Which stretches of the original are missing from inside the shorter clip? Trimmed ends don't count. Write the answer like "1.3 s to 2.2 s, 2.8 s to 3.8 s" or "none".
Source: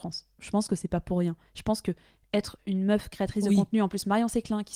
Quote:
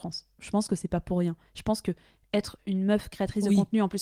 none